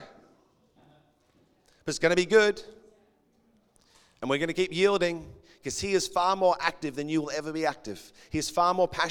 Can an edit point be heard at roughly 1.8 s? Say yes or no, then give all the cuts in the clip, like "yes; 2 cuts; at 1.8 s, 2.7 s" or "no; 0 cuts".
no; 0 cuts